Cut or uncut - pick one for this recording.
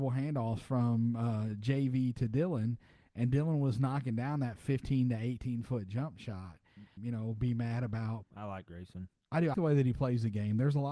cut